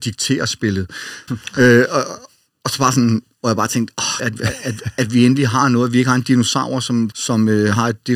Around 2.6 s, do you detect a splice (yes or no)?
no